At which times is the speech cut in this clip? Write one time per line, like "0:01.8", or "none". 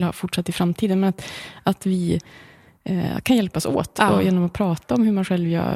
none